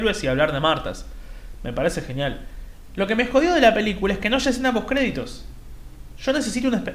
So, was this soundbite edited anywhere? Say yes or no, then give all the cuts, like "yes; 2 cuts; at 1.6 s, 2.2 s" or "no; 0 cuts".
yes; 1 cut; at 2.9 s